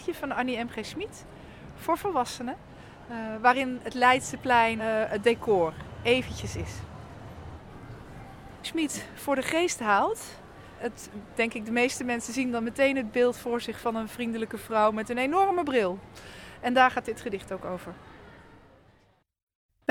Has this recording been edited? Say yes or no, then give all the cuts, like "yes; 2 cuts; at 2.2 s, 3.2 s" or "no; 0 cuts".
yes; 3 cuts; at 4.8 s, 8.6 s, 10.8 s